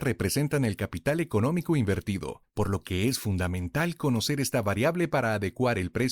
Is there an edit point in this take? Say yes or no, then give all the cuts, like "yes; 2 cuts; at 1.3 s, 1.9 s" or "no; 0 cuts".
no; 0 cuts